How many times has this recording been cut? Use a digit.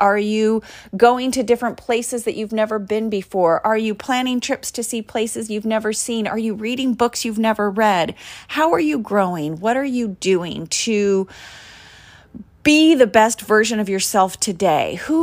0